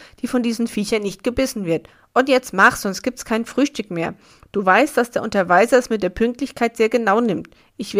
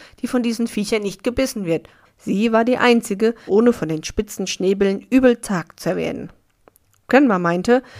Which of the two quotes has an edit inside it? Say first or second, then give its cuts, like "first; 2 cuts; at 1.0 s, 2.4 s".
second; 2 cuts; at 2.0 s, 3.5 s